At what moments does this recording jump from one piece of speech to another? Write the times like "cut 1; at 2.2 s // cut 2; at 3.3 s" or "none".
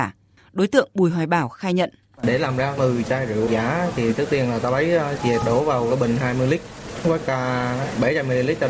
cut 1; at 3.5 s // cut 2; at 5.2 s

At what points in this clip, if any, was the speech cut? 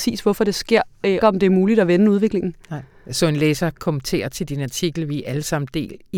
cut 1; at 1.2 s

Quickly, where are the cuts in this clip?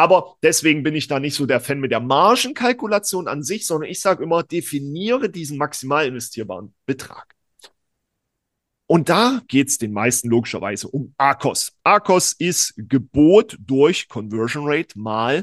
cut 1; at 9.5 s

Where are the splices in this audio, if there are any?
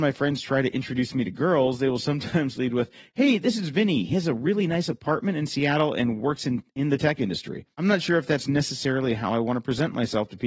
none

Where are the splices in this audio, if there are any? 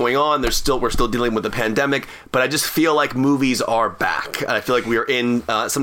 none

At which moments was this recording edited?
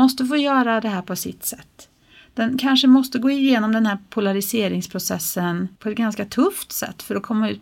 cut 1; at 5.7 s

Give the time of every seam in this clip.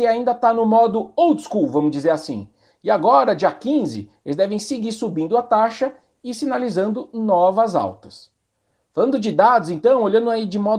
none

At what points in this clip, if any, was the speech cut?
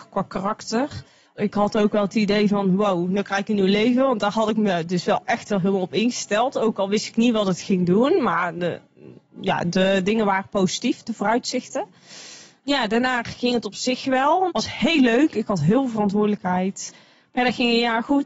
cut 1; at 14.5 s

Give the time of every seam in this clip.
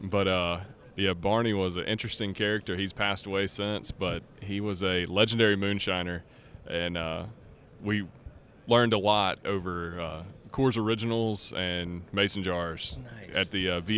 none

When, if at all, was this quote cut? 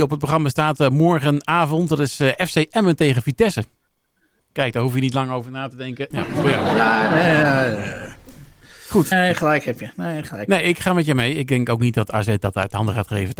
cut 1; at 4.4 s // cut 2; at 6.1 s // cut 3; at 9.1 s

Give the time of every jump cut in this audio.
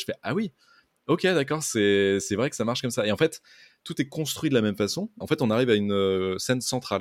cut 1; at 5.2 s

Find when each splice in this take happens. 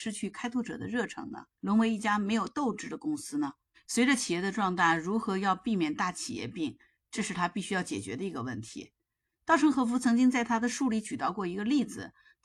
cut 1; at 1.5 s

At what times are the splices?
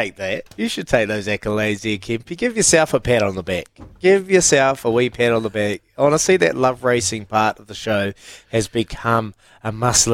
none

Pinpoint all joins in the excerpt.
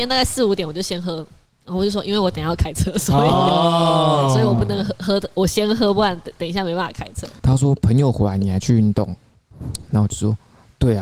cut 1; at 7.4 s

